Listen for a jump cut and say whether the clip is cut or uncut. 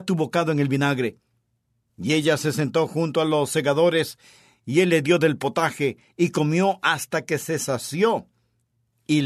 uncut